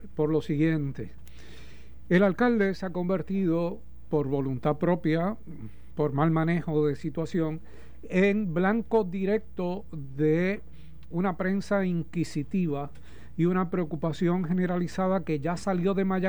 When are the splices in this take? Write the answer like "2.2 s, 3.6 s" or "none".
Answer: 11.1 s